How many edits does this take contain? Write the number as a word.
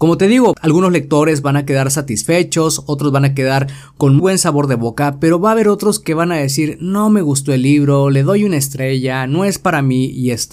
one